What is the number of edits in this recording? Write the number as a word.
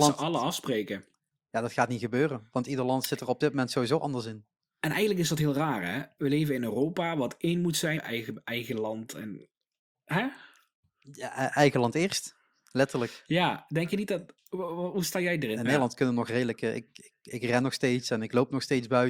two